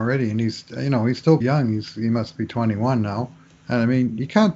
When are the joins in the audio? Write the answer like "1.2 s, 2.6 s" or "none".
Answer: 1.4 s, 3.5 s